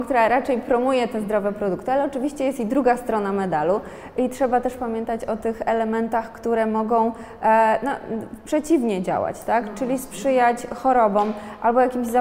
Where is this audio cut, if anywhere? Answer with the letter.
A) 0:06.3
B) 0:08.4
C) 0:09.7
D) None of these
D